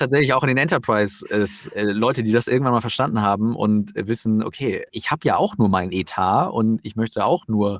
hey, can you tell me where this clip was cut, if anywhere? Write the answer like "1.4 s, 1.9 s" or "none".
4.9 s